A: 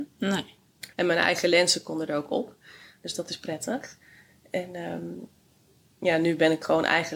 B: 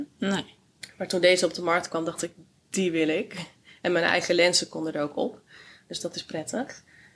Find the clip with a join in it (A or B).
A